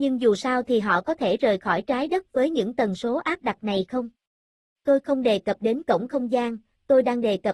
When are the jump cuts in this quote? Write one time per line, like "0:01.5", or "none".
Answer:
none